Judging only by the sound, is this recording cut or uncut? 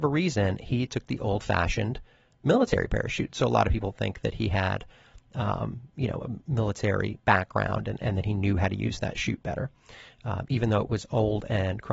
uncut